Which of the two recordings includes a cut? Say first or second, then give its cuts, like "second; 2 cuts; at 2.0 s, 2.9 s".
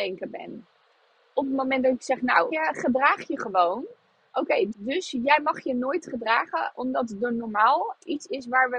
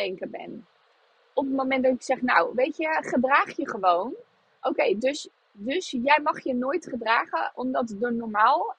first; 2 cuts; at 2.5 s, 4.7 s